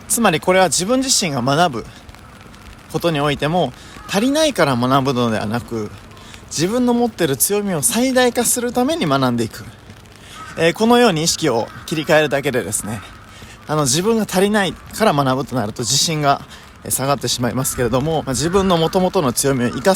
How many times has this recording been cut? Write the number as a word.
one